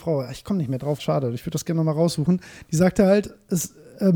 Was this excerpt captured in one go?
no; 1 cut; at 1.0 s

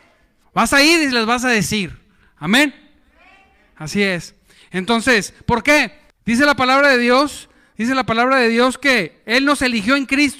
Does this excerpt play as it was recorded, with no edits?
no; 1 cut; at 6.1 s

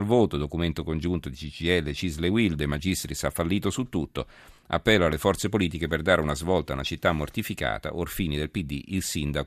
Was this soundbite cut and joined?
no; 0 cuts

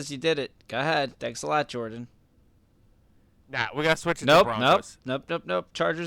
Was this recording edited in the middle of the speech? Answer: no; 0 cuts

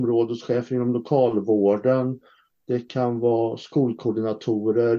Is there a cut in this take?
no; 0 cuts

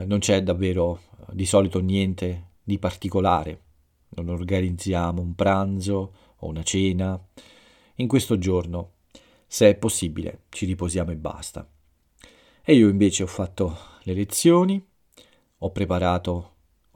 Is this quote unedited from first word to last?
yes; 0 cuts

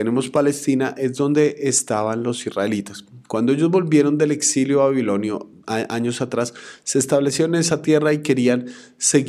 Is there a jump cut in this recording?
no; 0 cuts

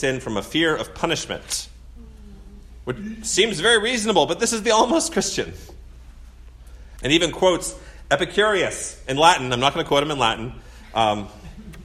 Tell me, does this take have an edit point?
yes; 1 cut; at 7.0 s

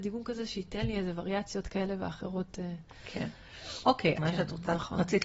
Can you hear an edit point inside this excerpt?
yes; 1 cut; at 4.2 s

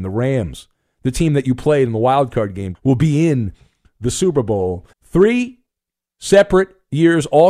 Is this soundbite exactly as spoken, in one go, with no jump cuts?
no; 2 cuts; at 2.8 s, 4.9 s

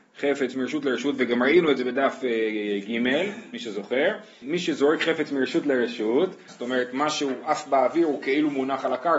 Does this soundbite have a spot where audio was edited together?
yes; 2 cuts; at 4.4 s, 6.5 s

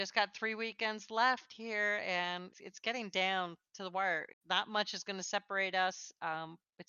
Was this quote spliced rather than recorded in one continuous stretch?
yes; 2 cuts; at 2.5 s, 4.3 s

